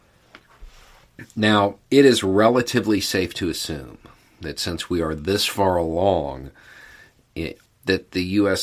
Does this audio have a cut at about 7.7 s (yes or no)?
yes